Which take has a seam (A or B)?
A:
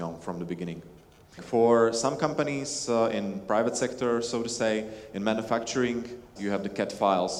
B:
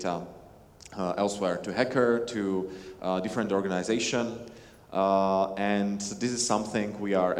A